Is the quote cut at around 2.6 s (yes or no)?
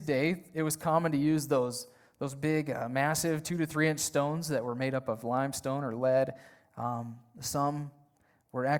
no